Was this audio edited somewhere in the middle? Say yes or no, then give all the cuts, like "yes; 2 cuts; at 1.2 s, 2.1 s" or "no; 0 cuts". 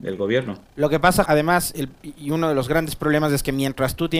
yes; 1 cut; at 1.2 s